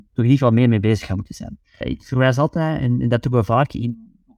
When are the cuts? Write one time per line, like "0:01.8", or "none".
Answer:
0:01.8